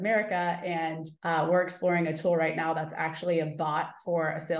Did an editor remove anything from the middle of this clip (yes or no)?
yes